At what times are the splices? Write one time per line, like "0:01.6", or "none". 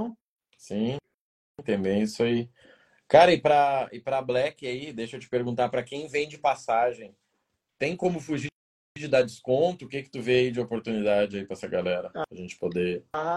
none